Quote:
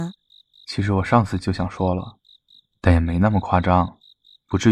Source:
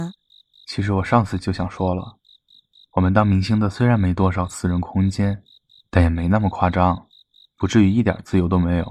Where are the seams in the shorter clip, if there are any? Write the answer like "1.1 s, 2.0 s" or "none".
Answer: 2.7 s